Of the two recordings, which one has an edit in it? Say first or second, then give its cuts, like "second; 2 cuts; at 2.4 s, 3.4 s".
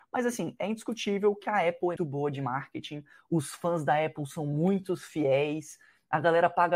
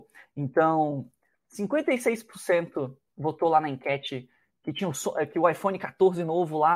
first; 1 cut; at 2.0 s